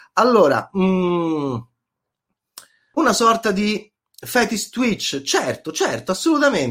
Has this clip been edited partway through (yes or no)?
yes